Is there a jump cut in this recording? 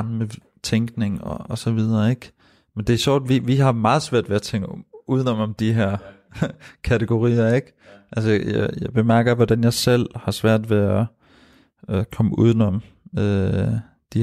no; 0 cuts

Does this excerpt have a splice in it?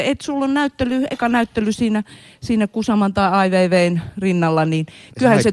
no; 0 cuts

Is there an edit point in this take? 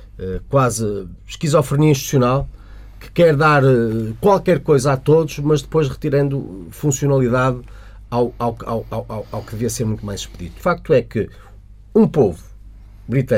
yes; 1 cut; at 10.6 s

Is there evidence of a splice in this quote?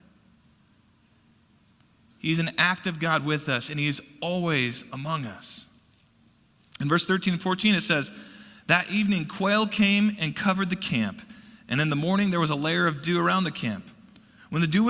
no; 0 cuts

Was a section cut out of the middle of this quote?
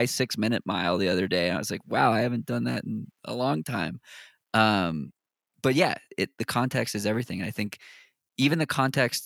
no; 0 cuts

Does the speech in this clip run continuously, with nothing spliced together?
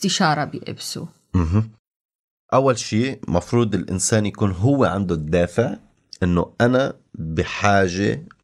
yes; 0 cuts

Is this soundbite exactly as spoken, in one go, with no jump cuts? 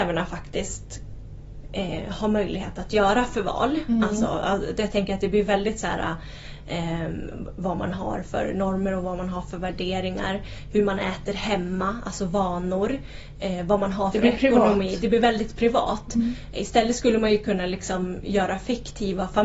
yes; 0 cuts

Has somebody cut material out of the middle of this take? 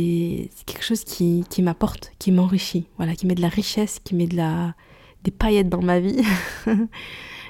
no; 0 cuts

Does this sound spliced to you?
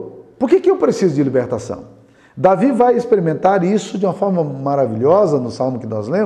no; 0 cuts

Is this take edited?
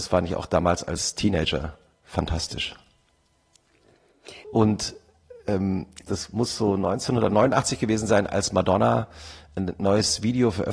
yes; 2 cuts; at 4.4 s, 6.1 s

